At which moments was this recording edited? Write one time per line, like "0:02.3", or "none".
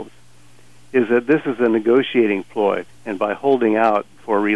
0:02.9